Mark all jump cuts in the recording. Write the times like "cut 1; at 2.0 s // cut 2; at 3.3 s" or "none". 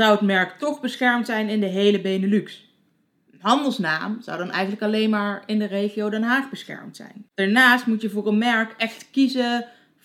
none